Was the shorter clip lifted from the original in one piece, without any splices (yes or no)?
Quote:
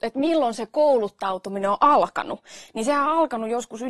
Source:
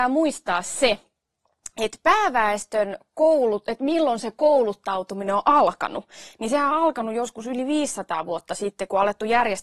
yes